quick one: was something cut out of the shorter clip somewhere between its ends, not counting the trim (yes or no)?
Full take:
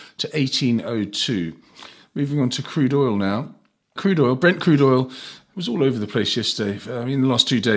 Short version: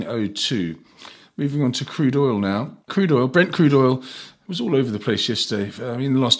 yes